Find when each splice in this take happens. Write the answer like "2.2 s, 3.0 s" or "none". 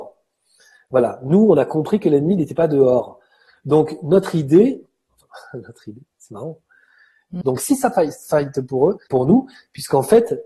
7.4 s, 9.1 s